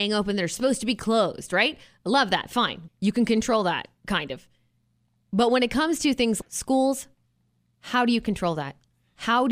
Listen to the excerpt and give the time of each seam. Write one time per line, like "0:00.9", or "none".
0:02.9
0:06.4